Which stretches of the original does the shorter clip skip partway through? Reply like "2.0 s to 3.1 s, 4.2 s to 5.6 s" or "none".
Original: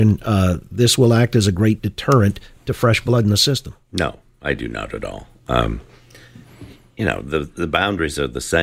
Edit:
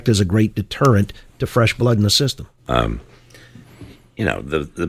3.8 s to 5.4 s